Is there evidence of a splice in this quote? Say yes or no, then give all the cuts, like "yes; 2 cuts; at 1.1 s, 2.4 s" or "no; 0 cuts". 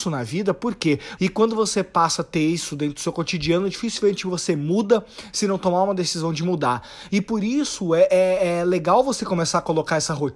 yes; 2 cuts; at 1.2 s, 7.1 s